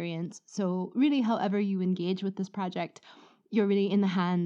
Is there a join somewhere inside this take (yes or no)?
no